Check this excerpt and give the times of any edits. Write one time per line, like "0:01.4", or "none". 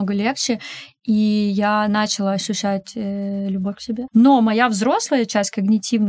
0:04.1